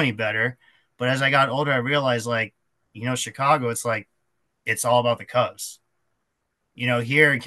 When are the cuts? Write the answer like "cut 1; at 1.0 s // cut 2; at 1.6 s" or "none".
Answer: none